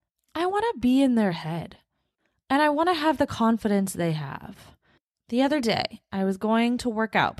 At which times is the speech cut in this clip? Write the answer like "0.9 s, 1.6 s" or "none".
none

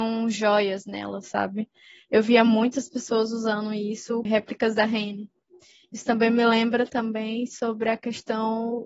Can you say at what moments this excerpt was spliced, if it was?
4.2 s

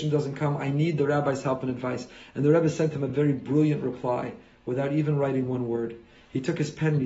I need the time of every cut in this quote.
none

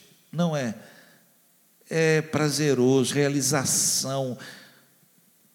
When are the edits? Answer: 3.1 s

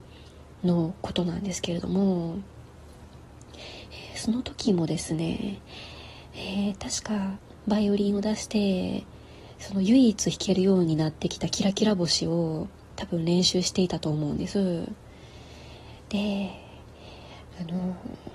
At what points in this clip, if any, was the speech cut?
none

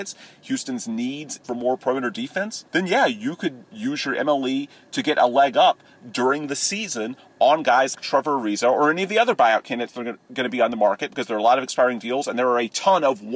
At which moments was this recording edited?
1.4 s, 2.7 s, 7.9 s

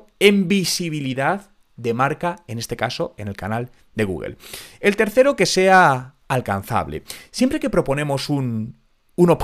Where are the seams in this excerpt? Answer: 6.2 s

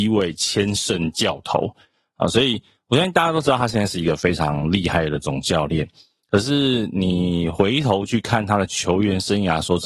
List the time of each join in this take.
none

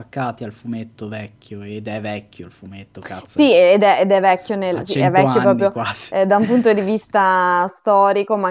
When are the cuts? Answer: none

